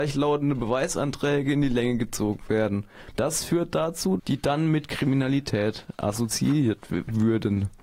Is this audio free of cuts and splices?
no; 2 cuts; at 3.1 s, 4.2 s

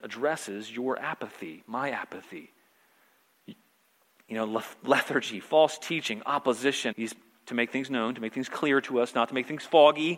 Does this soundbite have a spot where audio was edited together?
yes; 1 cut; at 6.9 s

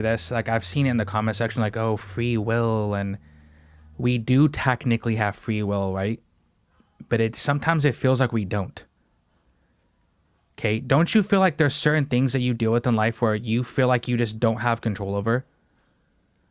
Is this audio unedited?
yes; 0 cuts

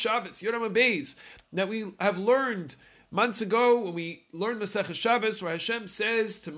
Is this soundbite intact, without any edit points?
yes; 0 cuts

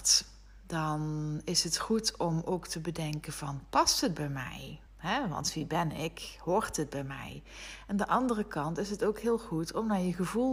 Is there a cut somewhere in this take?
yes; 1 cut; at 4.9 s

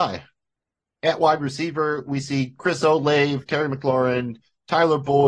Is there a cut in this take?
no; 0 cuts

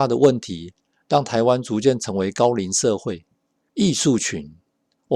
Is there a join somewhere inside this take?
yes; 1 cut; at 3.7 s

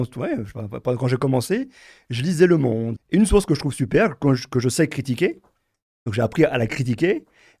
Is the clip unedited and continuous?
no; 1 cut; at 3.0 s

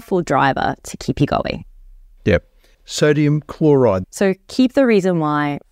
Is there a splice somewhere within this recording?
yes; 2 cuts; at 2.7 s, 4.0 s

